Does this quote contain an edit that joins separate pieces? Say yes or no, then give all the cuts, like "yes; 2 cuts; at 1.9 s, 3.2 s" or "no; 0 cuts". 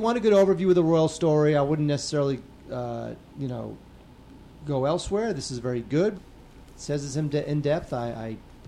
yes; 1 cut; at 6.1 s